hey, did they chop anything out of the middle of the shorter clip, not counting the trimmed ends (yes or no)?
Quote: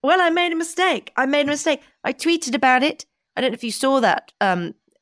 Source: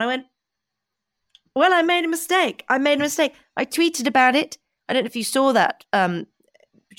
no